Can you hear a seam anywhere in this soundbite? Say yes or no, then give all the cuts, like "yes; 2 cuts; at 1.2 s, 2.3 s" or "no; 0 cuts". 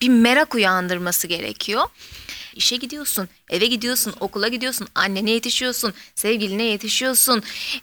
yes; 1 cut; at 2.5 s